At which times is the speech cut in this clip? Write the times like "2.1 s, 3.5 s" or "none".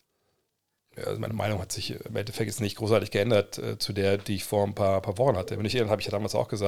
none